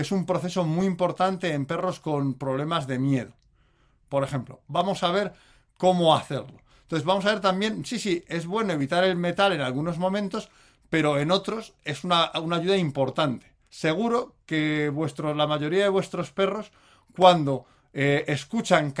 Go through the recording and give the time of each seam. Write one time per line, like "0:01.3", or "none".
0:13.7